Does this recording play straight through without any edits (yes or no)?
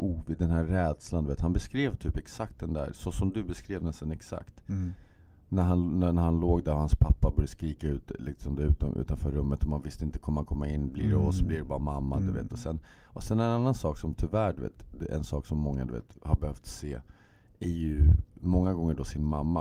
yes